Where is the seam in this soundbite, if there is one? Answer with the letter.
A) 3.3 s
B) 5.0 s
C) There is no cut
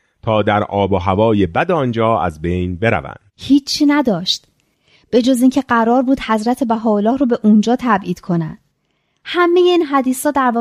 A